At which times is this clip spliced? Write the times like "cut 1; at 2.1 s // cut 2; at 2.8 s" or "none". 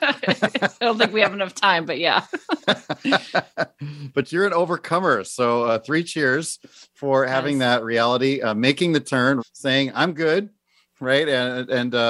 cut 1; at 9.4 s